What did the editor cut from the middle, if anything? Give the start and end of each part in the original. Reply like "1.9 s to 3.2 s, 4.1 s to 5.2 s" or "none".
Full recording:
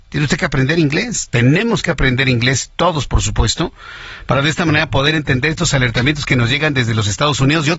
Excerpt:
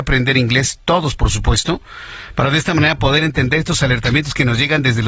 none